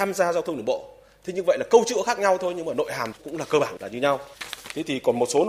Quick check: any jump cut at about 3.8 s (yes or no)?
yes